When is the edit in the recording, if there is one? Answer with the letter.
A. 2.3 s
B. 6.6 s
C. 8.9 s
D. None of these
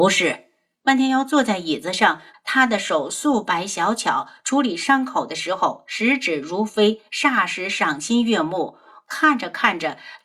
A